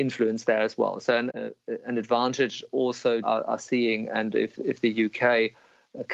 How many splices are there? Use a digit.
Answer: 2